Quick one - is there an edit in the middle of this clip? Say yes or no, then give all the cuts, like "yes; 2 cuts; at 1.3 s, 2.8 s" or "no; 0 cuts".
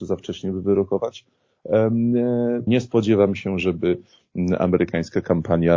yes; 1 cut; at 2.7 s